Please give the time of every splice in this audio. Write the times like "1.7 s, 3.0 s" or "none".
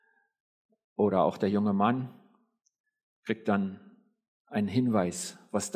none